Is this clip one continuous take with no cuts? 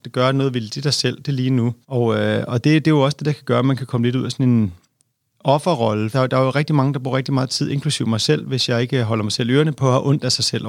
no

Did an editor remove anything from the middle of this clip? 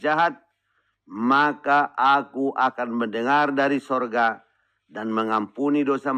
no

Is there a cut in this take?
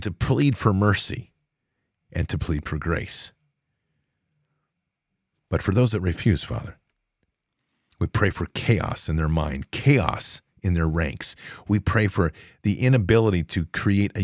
no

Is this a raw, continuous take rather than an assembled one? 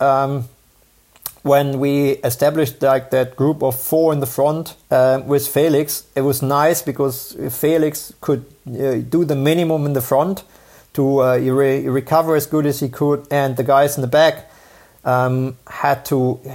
no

